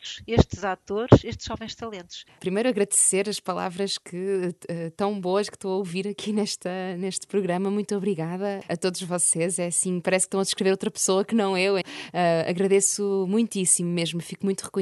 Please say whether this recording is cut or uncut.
cut